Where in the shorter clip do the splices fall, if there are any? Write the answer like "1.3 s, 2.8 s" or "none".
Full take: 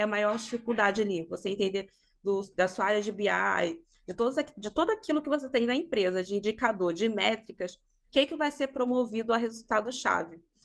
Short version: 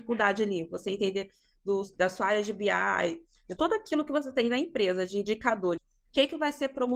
3.6 s, 5.8 s